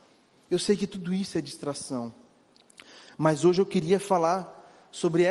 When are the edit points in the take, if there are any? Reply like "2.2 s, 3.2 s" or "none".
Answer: none